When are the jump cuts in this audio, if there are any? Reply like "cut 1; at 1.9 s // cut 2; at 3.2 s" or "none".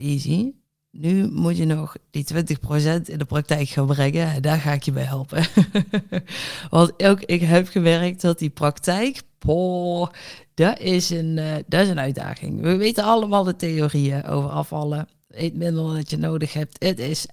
none